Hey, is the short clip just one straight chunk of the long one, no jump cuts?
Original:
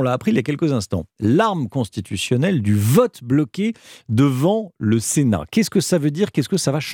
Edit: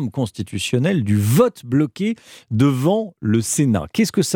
yes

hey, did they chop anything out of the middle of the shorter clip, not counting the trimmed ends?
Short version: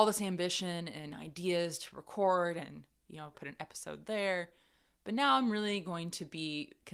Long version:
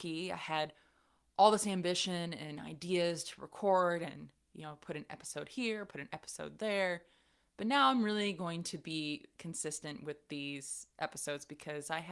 yes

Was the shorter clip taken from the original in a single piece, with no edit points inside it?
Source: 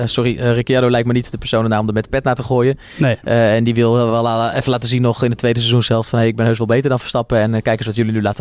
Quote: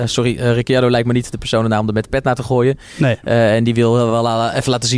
yes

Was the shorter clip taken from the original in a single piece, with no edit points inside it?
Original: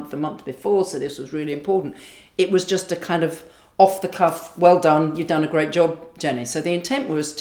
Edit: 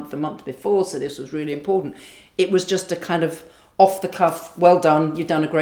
yes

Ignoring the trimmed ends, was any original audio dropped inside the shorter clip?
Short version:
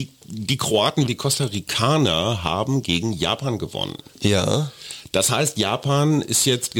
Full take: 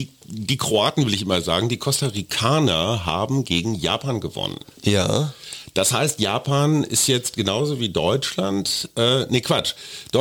yes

